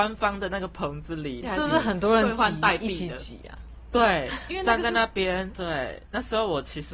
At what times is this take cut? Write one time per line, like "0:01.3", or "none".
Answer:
0:01.4
0:05.5